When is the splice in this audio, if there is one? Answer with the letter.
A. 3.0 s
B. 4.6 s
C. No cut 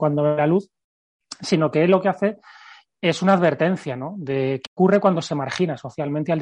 B